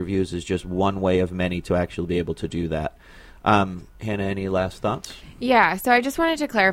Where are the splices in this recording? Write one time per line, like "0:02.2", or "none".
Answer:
none